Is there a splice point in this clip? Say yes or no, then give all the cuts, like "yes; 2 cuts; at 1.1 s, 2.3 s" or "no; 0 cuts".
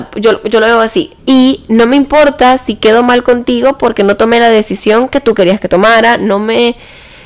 yes; 1 cut; at 1.2 s